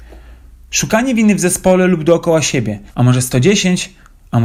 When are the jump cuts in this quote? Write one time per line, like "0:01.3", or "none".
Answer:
0:02.9